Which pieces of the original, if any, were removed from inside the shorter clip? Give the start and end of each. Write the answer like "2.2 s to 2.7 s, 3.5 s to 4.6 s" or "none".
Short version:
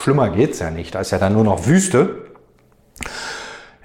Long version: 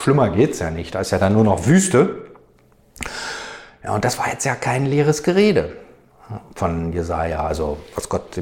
none